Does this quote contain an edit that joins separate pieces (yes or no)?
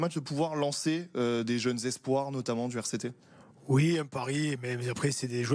no